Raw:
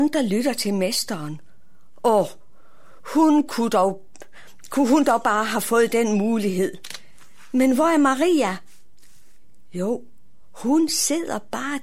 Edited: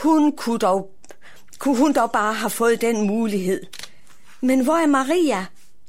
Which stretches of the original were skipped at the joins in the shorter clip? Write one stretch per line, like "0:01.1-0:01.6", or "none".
none